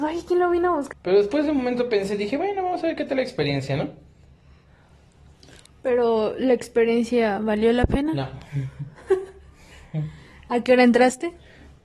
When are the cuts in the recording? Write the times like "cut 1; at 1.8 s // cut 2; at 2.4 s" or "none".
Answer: cut 1; at 0.9 s